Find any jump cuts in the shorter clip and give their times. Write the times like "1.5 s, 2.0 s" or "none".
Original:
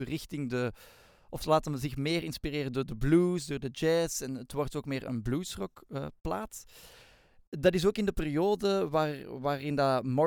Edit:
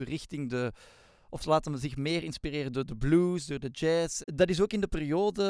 4.2 s